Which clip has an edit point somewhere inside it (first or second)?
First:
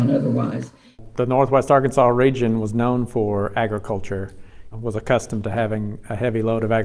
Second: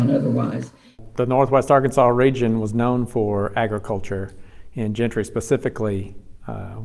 first